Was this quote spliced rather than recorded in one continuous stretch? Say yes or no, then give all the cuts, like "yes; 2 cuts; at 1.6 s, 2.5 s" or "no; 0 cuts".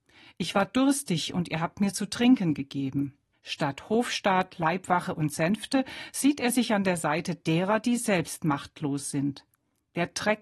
yes; 1 cut; at 3.3 s